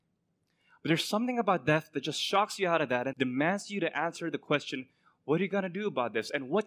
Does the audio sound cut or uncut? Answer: cut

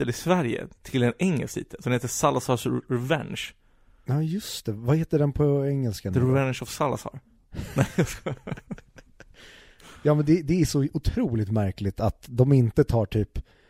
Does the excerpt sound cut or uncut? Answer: uncut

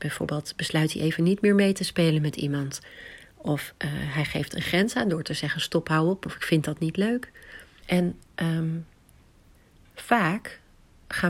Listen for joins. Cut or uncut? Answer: cut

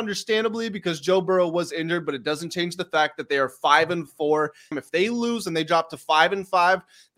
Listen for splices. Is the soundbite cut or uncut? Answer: cut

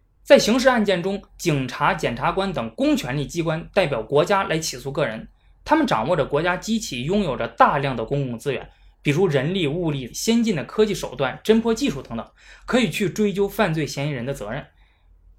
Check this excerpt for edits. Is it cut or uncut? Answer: cut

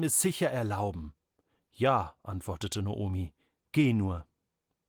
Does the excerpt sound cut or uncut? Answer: uncut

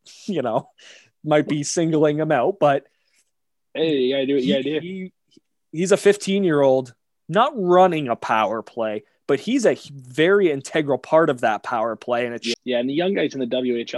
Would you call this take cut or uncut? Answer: cut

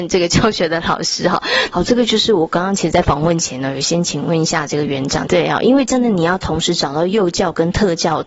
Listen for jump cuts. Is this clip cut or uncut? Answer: cut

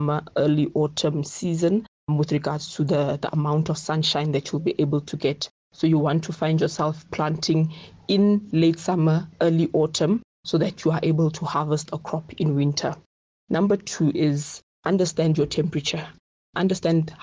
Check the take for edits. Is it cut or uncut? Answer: uncut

